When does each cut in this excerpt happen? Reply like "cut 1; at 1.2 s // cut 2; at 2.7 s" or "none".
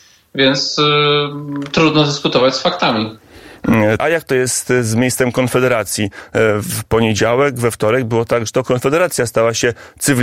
cut 1; at 4.0 s